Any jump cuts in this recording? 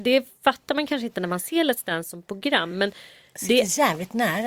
no; 0 cuts

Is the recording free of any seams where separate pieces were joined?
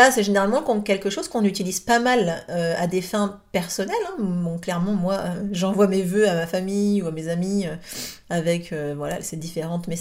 yes; 0 cuts

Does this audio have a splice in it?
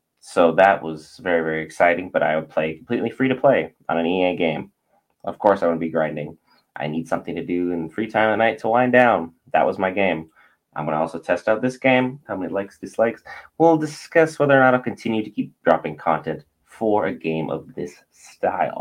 yes; 1 cut; at 12.2 s

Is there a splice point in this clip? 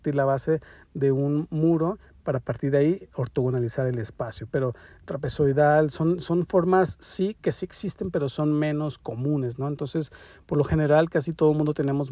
yes; 1 cut; at 4.5 s

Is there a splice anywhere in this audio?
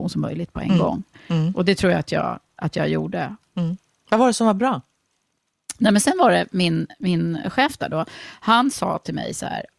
no; 0 cuts

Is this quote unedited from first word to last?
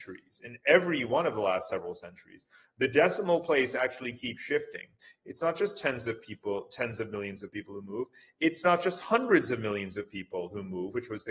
no; 1 cut; at 5.2 s

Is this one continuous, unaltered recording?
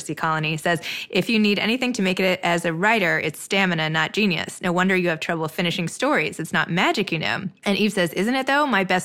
yes; 0 cuts

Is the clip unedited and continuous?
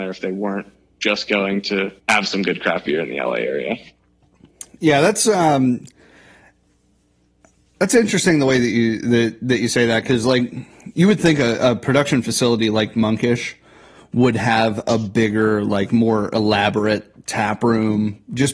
no; 1 cut; at 2.0 s

